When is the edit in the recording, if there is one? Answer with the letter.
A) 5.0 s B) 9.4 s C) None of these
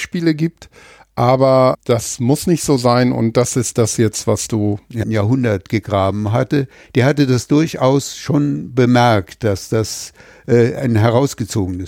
A